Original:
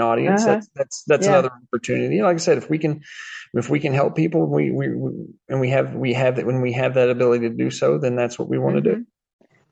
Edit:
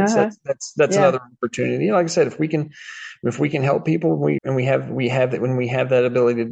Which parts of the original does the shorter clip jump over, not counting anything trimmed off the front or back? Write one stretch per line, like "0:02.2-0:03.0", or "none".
0:04.7-0:05.4

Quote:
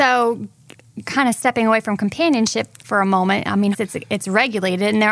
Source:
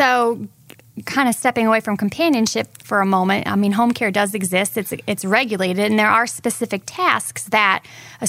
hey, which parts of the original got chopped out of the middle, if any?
0:03.7-0:04.7

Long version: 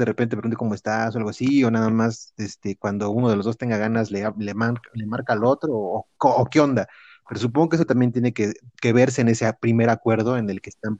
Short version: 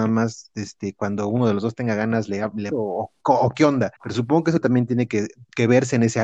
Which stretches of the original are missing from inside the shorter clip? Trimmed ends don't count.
0:04.5-0:05.7
0:06.9-0:07.2

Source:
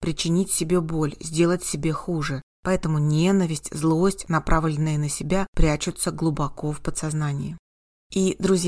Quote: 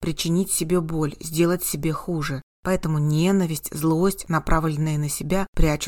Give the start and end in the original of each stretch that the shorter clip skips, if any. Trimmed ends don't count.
none

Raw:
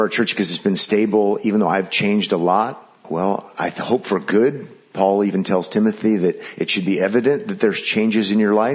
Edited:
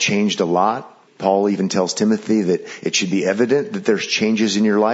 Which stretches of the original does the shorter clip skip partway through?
0:03.0-0:04.8

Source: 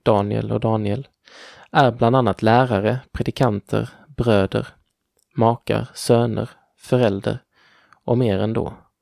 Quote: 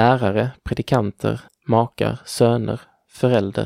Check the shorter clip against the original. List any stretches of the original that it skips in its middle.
0:04.0-0:05.2

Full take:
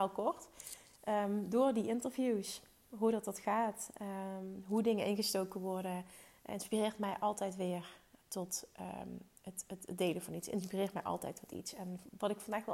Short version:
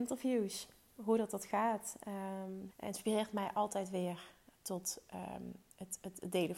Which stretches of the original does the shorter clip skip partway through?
0:04.6-0:06.4

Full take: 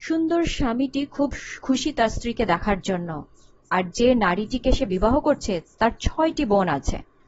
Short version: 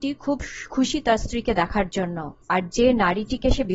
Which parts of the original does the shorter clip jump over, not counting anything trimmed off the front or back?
0:03.3-0:03.6

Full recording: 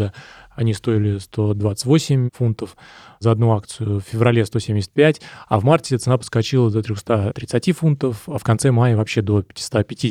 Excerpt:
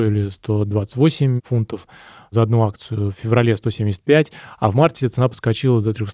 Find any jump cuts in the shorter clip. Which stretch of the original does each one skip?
none

